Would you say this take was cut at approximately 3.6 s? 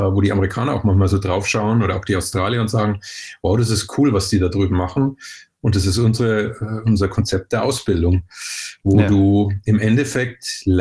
no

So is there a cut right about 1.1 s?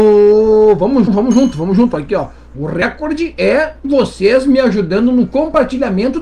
yes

